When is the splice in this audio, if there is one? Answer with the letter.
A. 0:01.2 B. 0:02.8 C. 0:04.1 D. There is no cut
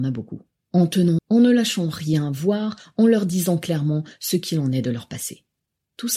A